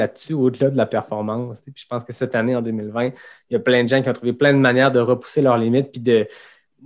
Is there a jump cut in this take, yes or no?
yes